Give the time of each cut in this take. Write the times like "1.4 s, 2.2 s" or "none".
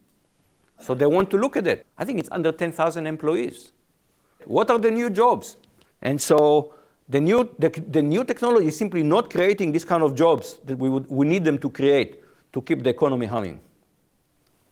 1.8 s, 4.4 s, 5.9 s